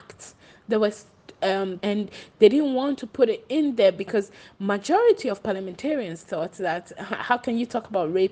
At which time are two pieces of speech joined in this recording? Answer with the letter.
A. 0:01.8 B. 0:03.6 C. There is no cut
A